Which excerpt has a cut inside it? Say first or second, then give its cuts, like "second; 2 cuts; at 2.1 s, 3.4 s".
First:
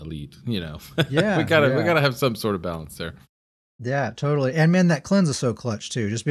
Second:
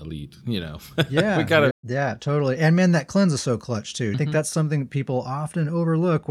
second; 2 cuts; at 1.7 s, 4.1 s